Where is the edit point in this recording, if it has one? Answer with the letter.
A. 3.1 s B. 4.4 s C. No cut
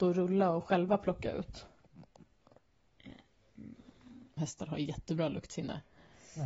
B